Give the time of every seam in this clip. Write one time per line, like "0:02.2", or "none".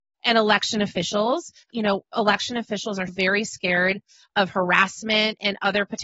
0:01.7
0:03.1